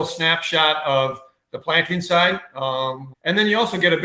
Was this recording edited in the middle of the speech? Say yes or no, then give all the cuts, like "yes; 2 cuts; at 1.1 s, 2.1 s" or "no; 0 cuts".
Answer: yes; 1 cut; at 3.1 s